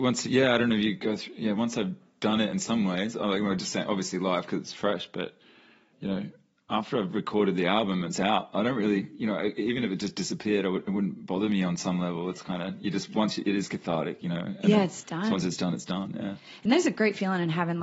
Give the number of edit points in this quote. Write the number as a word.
zero